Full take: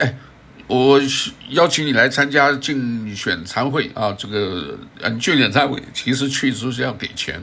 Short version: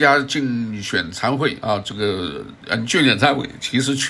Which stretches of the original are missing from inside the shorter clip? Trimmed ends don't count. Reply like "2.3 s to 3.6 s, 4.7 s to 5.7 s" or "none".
none